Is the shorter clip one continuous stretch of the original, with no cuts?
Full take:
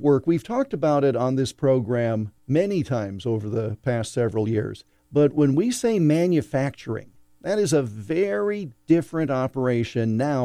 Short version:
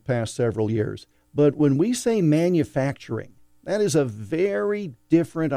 yes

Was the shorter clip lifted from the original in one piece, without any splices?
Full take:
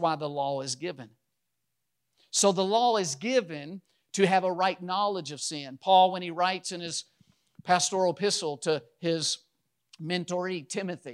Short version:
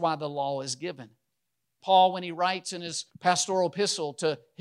no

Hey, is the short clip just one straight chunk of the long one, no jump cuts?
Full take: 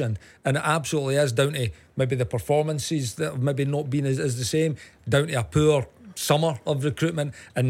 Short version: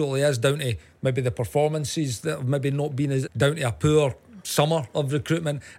no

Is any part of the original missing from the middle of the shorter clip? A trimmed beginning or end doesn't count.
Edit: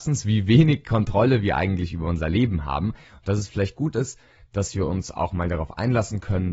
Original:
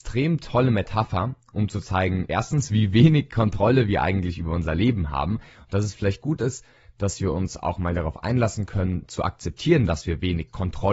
no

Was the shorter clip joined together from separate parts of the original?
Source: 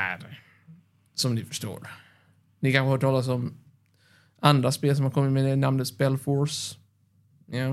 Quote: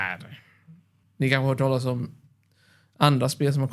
yes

